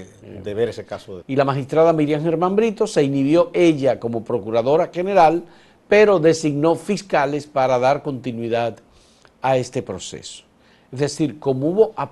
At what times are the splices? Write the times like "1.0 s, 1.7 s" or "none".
1.2 s